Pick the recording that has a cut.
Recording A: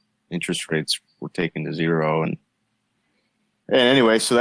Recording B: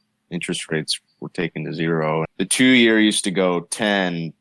B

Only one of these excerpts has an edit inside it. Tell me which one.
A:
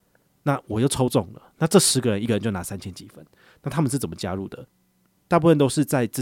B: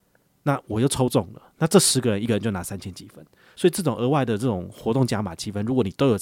A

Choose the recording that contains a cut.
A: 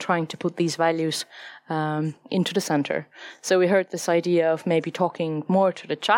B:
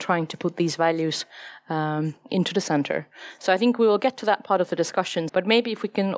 B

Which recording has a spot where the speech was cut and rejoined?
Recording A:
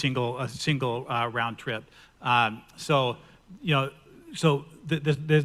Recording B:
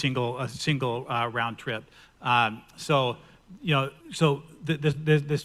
B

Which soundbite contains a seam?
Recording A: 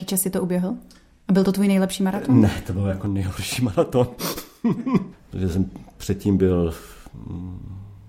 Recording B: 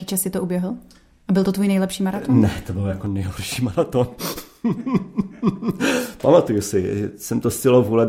A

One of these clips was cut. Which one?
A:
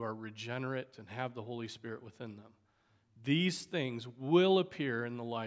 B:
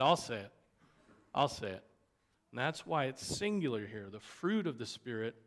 B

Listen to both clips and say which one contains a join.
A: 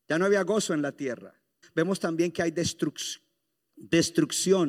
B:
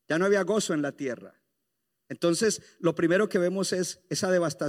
A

